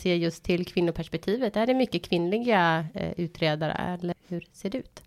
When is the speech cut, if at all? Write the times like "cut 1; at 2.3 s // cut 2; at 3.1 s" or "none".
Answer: cut 1; at 4.1 s